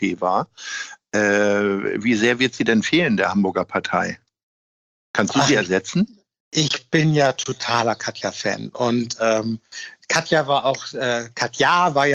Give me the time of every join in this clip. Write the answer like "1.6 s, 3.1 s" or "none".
none